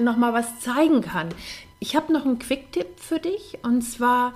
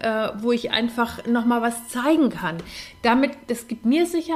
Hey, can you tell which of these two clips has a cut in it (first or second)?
first